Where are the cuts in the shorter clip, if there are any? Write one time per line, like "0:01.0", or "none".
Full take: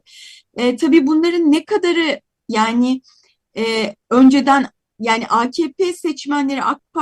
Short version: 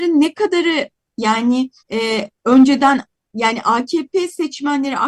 0:01.8